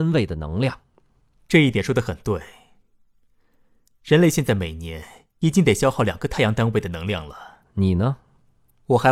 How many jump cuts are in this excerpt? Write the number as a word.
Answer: one